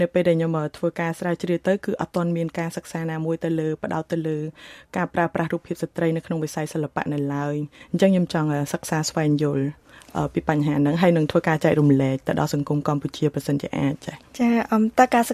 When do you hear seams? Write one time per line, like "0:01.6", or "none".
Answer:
0:14.3